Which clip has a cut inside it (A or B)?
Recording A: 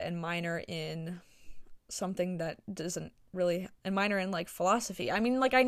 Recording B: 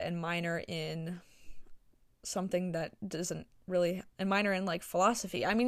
A